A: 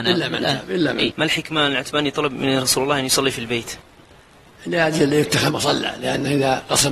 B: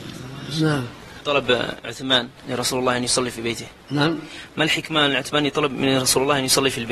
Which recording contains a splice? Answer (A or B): A